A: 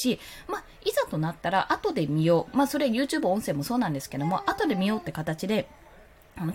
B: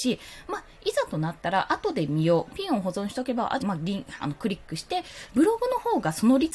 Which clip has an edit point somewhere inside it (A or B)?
B